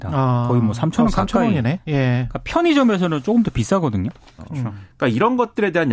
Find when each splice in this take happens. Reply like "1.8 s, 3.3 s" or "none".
1.8 s, 4.4 s